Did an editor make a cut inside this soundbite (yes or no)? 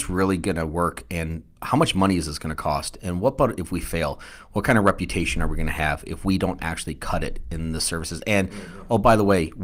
no